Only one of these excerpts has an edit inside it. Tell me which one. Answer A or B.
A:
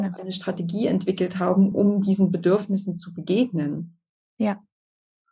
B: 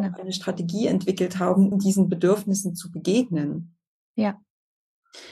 B